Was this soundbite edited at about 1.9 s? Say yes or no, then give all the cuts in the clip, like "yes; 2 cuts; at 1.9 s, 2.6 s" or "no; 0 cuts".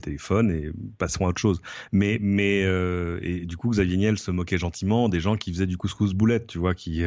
no; 0 cuts